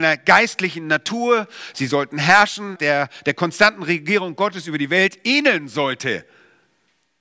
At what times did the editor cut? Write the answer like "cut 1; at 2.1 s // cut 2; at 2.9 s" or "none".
cut 1; at 2.8 s